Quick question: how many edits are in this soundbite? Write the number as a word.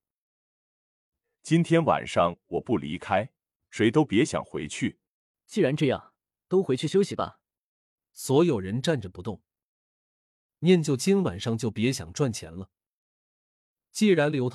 two